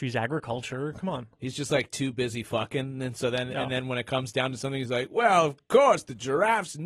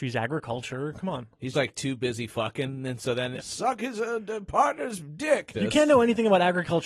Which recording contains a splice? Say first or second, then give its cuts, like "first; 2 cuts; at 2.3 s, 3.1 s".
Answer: second; 3 cuts; at 1.5 s, 3.4 s, 5.5 s